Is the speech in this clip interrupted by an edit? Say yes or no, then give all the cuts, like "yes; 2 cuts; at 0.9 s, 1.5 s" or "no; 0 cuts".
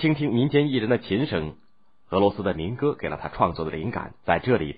no; 0 cuts